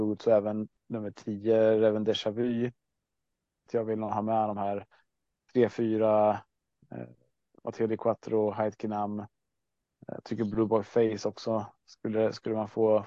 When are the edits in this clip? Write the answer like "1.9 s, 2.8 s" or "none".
3.7 s